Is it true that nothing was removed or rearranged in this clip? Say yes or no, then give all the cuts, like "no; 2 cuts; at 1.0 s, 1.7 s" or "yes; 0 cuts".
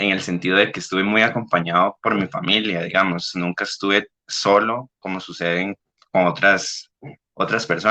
yes; 0 cuts